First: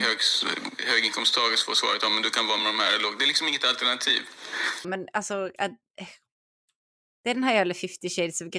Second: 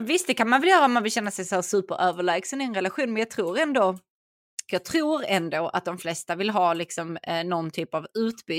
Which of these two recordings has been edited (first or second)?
first